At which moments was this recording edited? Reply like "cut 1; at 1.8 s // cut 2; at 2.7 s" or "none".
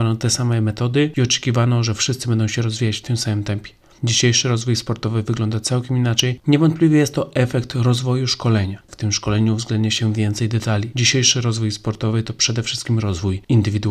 cut 1; at 6.4 s // cut 2; at 8.9 s // cut 3; at 10.9 s

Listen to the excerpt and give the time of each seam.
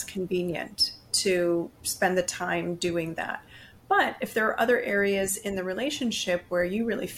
none

